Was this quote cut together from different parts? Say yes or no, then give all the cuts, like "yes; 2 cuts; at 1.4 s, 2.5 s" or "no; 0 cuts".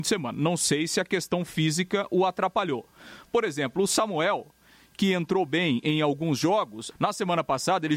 yes; 1 cut; at 6.9 s